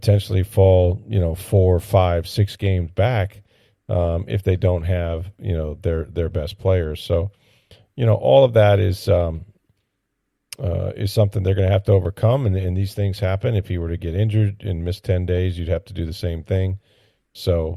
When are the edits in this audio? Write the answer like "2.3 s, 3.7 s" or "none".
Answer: none